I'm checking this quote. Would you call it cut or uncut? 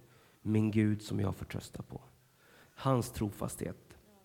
cut